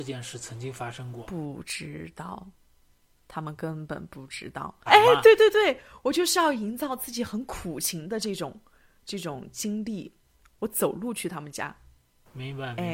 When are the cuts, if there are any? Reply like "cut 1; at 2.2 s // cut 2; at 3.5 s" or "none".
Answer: cut 1; at 4.9 s